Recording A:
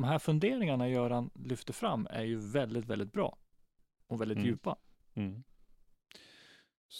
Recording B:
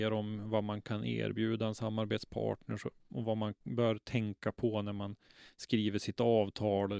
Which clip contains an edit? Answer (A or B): A